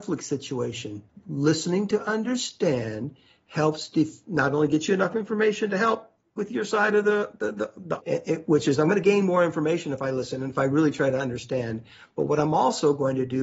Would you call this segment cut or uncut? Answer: cut